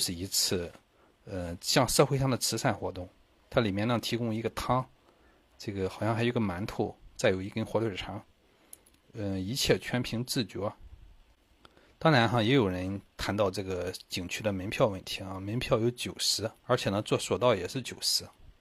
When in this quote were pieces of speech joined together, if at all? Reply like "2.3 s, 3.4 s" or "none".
11.9 s, 16.6 s